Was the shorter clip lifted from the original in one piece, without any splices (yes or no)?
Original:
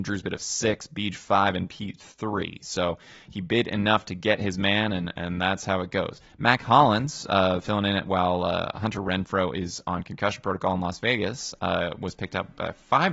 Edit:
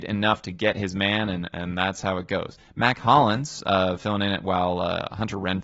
yes